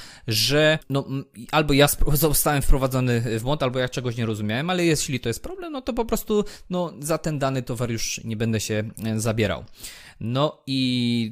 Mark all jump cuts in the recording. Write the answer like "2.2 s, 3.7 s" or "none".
none